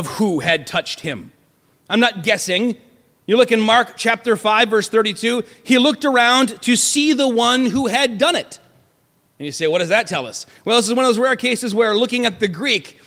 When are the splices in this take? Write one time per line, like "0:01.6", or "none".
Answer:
none